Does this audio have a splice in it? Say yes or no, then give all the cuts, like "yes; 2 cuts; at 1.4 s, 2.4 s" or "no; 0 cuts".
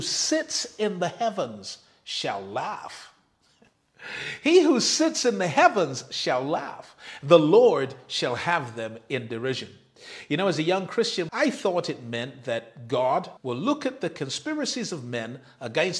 yes; 2 cuts; at 11.3 s, 13.4 s